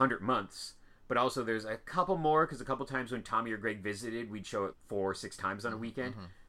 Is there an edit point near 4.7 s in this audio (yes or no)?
yes